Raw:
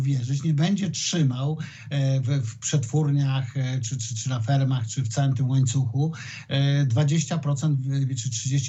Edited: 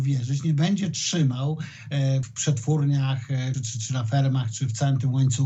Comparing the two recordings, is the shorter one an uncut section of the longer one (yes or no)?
no